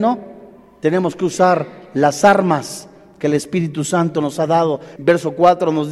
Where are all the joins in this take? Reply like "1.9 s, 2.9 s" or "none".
5.0 s